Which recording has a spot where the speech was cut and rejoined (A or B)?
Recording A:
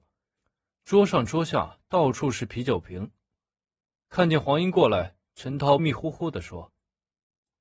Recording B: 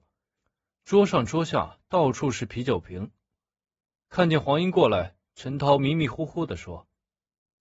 A